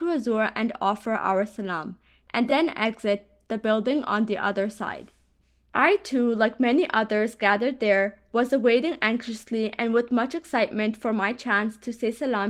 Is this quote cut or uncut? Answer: uncut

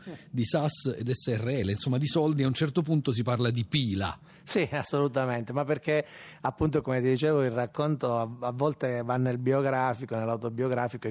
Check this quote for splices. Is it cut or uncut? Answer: uncut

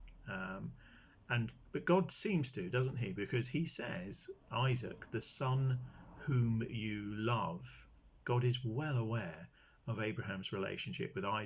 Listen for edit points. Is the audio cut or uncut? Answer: uncut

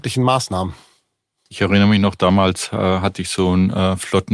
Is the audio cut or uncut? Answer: uncut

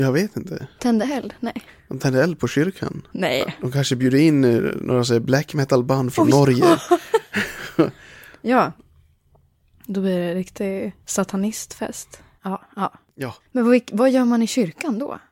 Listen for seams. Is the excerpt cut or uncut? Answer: cut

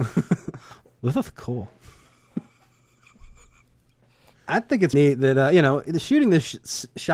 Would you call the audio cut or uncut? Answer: cut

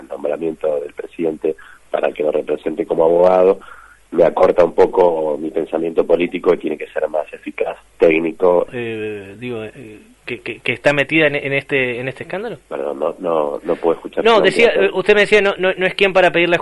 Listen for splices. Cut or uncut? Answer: cut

